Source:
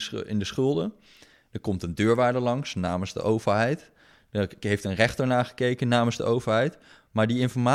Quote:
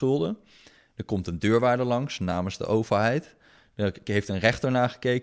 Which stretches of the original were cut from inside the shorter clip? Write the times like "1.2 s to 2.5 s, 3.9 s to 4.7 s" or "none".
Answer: none